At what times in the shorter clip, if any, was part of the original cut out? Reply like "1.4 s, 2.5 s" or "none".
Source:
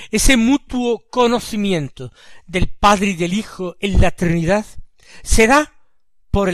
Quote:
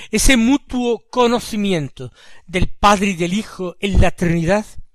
none

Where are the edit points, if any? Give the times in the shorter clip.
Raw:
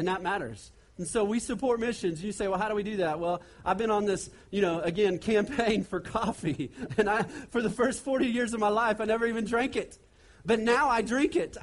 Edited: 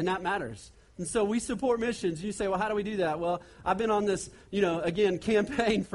none

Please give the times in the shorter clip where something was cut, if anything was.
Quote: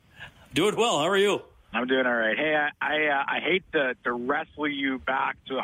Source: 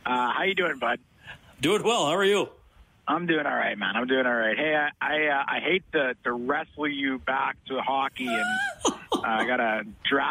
1.7 s

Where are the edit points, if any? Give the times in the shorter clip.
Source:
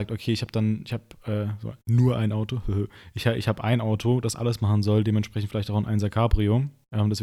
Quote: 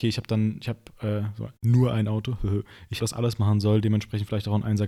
3.0 s

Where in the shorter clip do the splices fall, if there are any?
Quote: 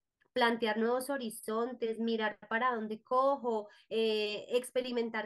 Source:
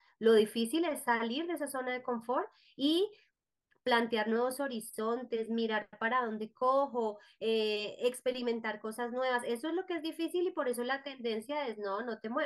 none

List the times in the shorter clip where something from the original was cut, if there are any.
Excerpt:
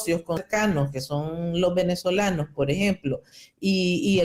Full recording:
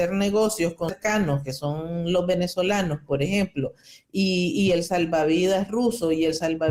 none

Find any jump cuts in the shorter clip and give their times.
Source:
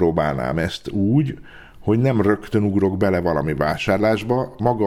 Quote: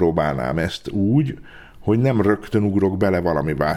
none

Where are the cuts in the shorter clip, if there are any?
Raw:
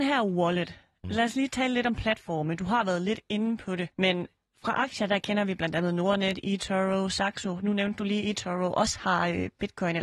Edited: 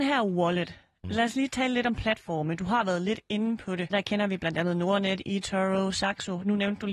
3.9 s

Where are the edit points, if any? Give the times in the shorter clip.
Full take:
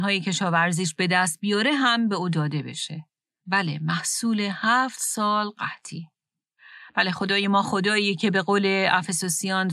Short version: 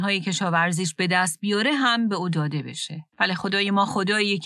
3.1 s

